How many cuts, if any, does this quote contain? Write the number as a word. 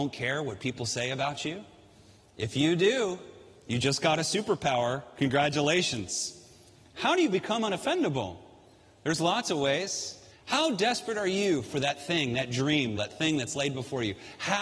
two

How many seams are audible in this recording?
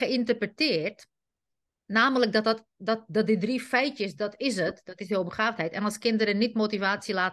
zero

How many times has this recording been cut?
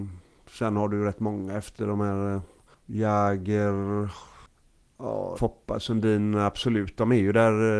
one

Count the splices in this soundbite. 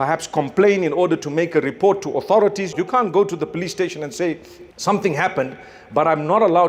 two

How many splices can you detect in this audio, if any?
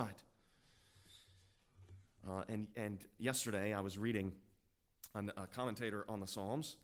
zero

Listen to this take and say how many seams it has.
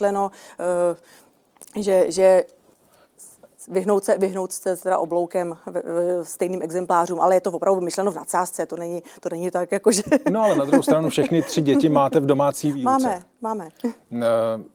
zero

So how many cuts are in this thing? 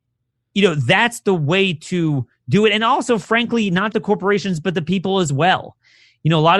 one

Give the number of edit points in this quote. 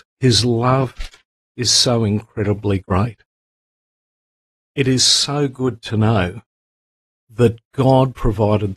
zero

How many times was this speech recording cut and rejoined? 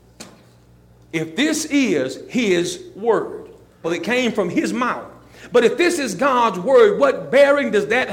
one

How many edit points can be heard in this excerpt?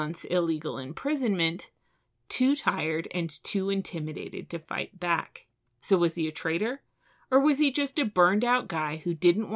one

